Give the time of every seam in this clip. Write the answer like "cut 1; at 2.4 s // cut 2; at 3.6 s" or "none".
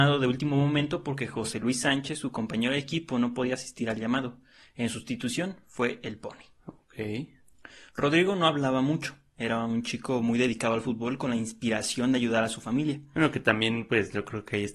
none